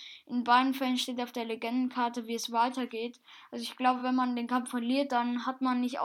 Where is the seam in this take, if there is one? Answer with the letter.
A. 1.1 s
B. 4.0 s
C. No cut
C